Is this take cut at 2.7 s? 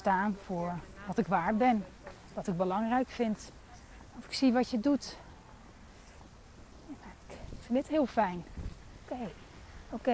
no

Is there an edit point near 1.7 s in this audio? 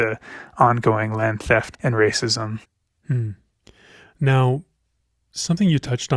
yes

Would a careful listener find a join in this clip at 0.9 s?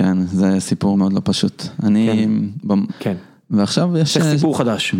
yes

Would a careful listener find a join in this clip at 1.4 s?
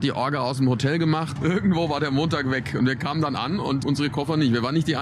yes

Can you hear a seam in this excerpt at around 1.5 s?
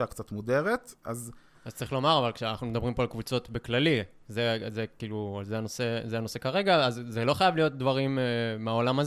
yes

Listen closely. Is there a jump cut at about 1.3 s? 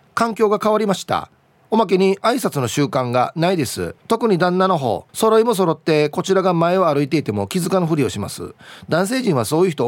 no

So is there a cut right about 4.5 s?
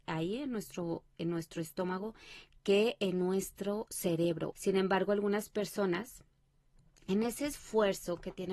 yes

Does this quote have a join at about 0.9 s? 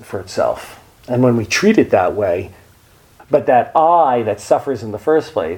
no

